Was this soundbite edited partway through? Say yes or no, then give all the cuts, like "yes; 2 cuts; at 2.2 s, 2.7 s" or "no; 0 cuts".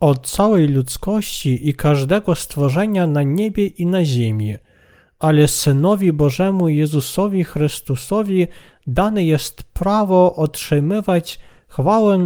no; 0 cuts